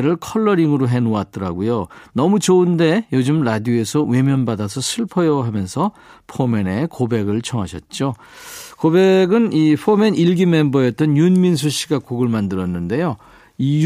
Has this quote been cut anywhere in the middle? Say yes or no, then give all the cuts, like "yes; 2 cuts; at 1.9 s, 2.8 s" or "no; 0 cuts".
no; 0 cuts